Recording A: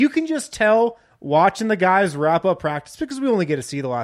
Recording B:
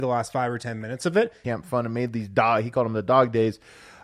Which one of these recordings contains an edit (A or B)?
B